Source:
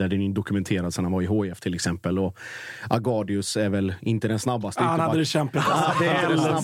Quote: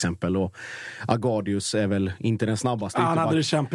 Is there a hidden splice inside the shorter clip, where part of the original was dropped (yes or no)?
no